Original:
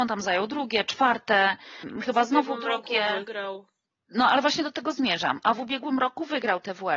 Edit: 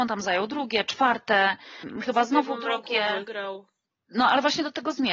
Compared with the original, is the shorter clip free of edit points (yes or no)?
yes